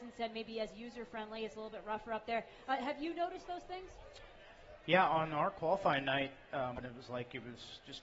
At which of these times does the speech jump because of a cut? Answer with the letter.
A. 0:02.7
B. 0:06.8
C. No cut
B